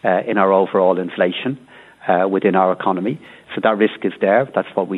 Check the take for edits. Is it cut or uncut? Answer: uncut